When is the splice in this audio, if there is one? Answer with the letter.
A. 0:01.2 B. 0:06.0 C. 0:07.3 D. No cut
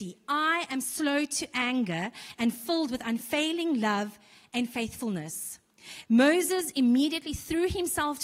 B